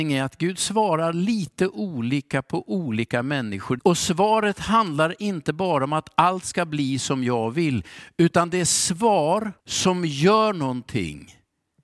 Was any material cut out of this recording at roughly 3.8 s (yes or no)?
yes